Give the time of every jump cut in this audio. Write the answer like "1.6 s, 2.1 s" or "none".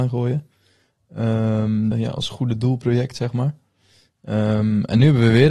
1.9 s